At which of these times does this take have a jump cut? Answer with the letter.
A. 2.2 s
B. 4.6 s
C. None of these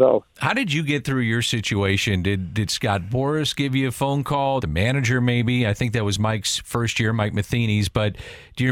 B